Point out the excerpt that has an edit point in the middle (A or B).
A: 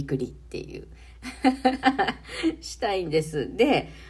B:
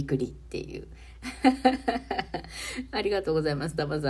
A